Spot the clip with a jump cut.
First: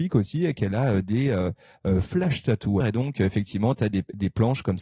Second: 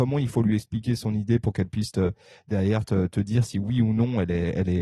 first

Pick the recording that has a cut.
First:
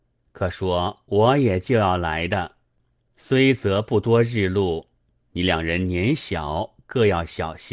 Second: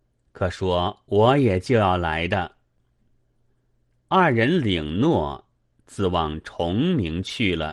second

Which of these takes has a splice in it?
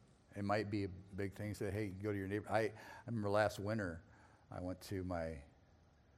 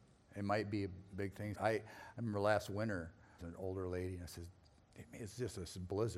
second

